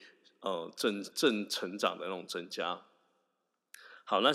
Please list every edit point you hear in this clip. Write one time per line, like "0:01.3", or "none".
0:01.1